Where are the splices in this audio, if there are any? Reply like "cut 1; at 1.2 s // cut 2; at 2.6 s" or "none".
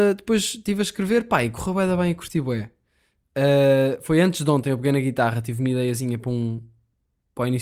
none